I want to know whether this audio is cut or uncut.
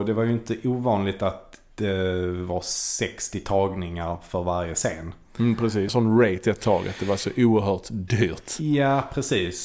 cut